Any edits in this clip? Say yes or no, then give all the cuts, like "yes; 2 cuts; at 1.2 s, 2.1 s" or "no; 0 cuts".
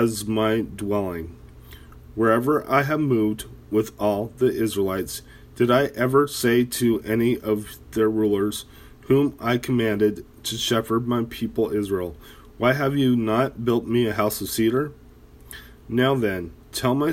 no; 0 cuts